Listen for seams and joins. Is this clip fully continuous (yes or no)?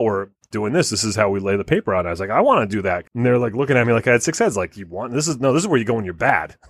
no